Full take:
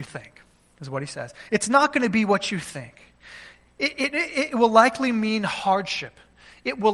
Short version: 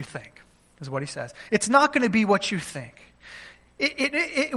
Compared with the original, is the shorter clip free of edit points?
yes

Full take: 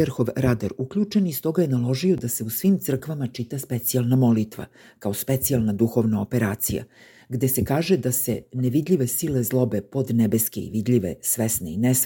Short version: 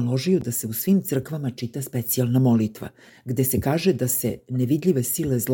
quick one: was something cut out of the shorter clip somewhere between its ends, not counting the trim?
yes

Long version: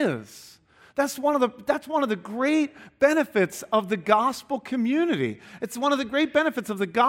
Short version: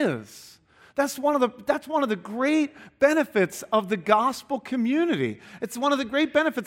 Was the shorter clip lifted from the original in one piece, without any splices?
yes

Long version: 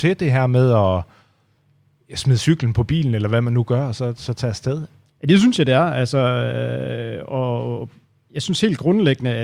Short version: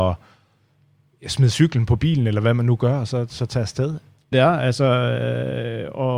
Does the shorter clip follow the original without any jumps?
no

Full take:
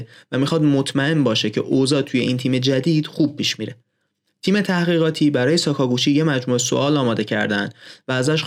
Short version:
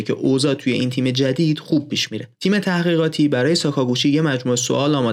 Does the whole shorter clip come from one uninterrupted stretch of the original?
no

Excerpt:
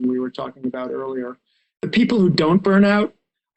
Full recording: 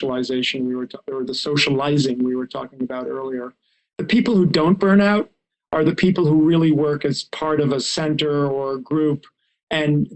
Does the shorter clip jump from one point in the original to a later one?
no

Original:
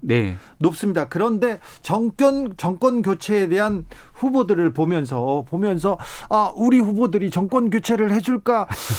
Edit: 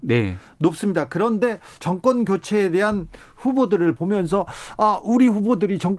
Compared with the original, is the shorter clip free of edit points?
no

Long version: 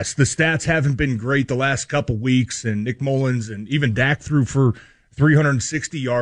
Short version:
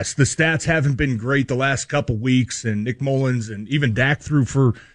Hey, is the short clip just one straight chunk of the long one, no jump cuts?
yes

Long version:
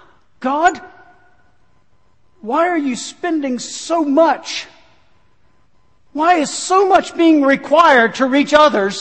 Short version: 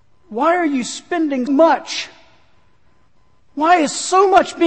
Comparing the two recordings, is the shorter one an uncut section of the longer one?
no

